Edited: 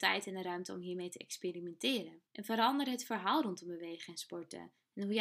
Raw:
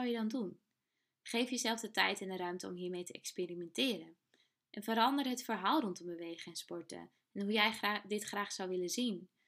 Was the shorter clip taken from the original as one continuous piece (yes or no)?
no